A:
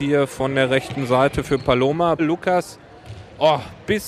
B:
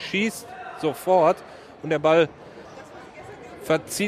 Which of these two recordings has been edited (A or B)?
A